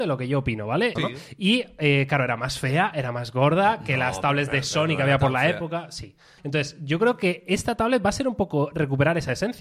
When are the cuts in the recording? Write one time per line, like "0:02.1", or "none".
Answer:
0:01.0
0:06.4